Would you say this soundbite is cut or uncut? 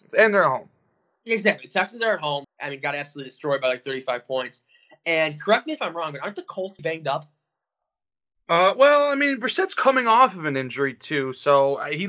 cut